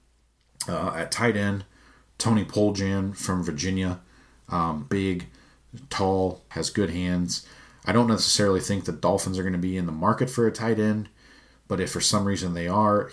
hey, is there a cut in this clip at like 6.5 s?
yes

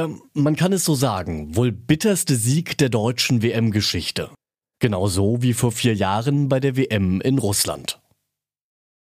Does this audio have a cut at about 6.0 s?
no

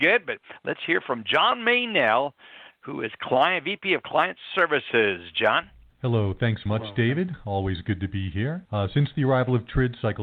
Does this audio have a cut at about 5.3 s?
no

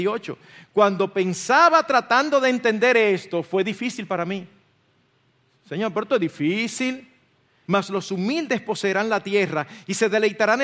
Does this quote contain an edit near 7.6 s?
yes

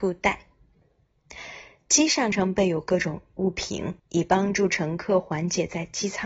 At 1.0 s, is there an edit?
no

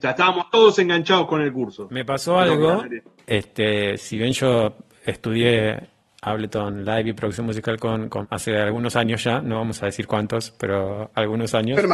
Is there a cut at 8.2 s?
yes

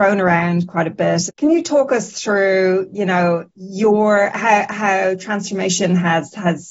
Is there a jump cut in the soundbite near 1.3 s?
yes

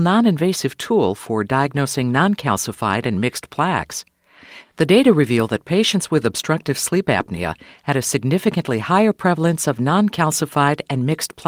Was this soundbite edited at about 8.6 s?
no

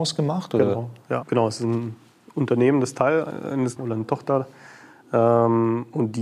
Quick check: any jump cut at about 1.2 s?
yes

